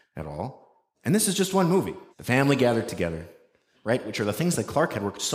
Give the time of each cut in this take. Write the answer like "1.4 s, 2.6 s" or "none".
2.1 s, 3.7 s